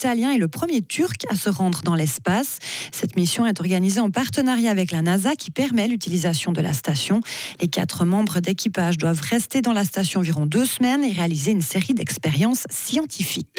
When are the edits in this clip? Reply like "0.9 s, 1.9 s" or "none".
none